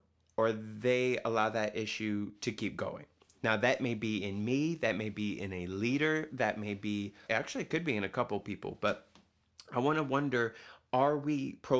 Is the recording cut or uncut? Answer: cut